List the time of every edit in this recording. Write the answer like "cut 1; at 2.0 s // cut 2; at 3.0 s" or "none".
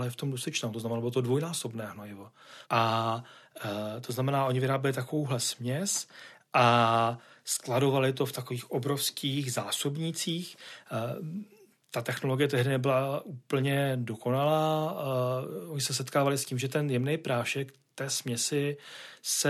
cut 1; at 2.6 s